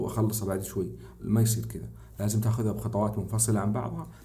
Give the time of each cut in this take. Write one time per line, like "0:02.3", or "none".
0:01.2